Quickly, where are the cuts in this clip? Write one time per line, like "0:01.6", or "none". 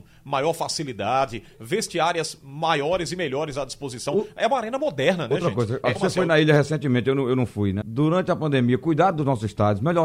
0:06.0
0:07.8